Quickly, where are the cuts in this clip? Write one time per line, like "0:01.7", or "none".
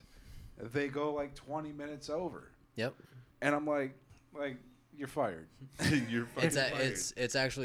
0:03.3